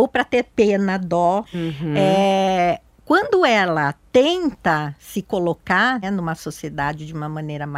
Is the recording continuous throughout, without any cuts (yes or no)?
no